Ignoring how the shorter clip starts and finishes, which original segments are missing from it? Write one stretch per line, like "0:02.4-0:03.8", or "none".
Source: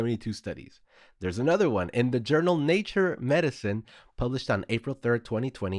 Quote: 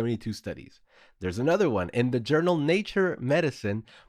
none